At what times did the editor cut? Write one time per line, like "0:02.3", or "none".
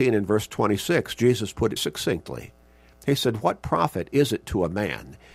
0:01.8

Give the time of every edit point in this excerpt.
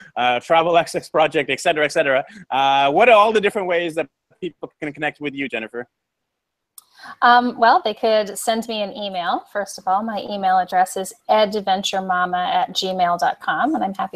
none

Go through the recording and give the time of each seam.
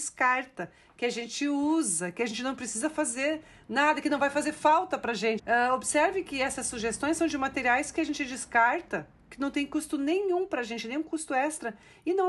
0:05.4

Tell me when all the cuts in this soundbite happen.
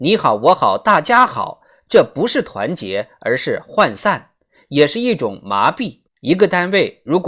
0:06.1

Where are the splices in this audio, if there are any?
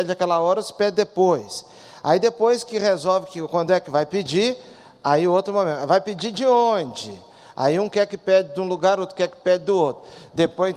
none

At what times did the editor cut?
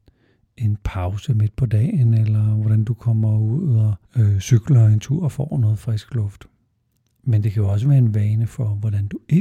0:04.0

